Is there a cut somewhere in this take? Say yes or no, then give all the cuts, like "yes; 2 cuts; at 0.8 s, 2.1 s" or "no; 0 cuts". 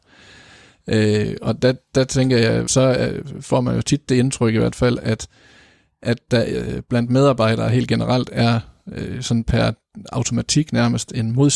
yes; 1 cut; at 2.7 s